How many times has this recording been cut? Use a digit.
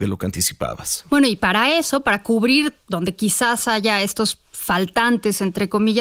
0